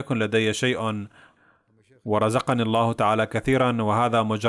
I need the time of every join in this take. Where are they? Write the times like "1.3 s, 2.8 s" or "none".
none